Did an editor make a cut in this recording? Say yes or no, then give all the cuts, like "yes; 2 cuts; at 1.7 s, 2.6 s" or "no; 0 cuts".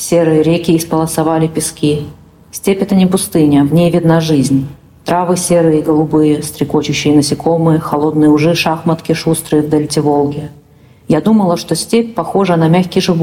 no; 0 cuts